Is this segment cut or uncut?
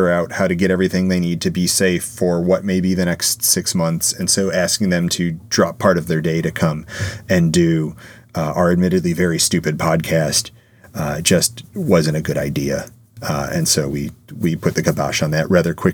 uncut